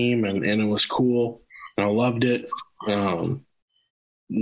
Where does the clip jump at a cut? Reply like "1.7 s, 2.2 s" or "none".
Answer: none